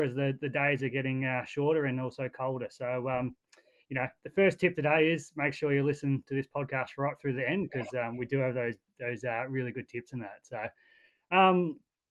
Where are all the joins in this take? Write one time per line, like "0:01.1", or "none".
none